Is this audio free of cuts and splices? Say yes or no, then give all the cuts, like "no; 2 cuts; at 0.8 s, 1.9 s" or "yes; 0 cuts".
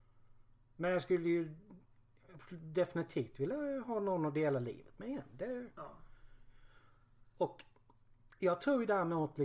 yes; 0 cuts